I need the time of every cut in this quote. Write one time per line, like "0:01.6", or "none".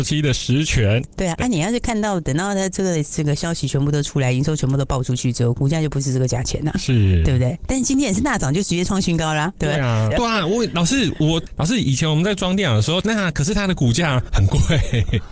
0:10.1
0:13.0